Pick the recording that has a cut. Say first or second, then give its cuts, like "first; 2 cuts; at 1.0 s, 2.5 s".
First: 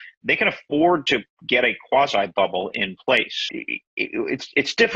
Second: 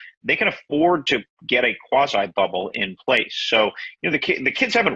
first; 1 cut; at 3.5 s